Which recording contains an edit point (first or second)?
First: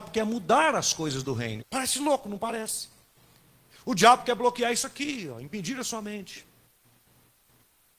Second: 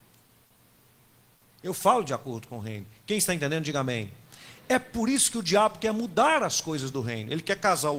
first